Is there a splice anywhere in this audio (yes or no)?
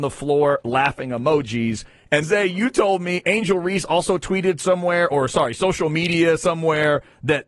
yes